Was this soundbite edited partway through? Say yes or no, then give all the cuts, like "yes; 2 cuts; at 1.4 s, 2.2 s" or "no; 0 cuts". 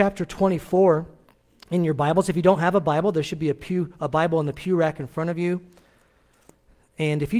no; 0 cuts